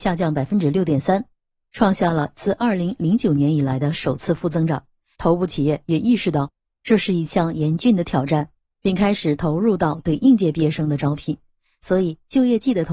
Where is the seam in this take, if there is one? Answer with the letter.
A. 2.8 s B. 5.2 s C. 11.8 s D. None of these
B